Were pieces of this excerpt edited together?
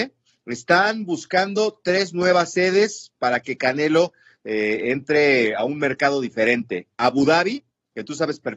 no; 0 cuts

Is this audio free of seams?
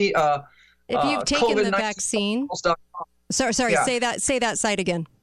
yes; 0 cuts

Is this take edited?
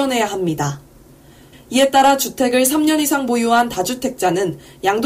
yes; 1 cut; at 1.5 s

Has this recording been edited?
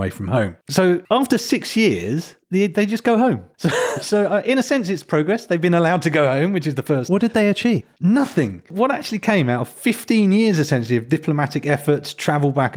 no; 0 cuts

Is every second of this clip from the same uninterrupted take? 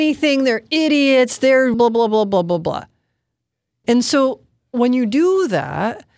no; 2 cuts; at 1.7 s, 3.8 s

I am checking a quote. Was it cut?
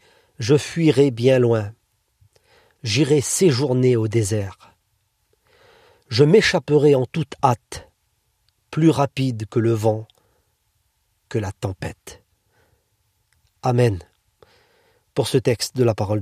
no; 0 cuts

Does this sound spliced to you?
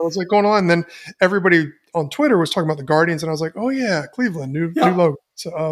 no; 0 cuts

